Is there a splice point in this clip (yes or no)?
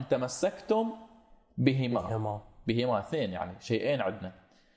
no